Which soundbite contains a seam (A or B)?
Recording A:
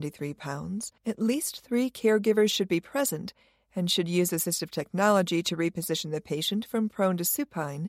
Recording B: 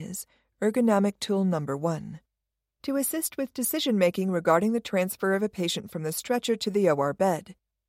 A